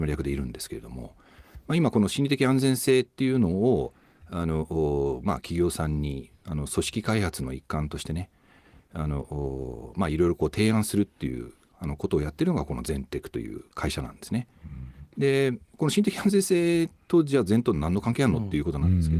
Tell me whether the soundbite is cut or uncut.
uncut